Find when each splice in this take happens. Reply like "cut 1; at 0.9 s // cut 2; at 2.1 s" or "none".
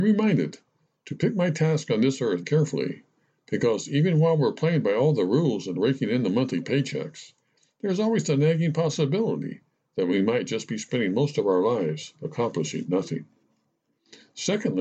cut 1; at 2.4 s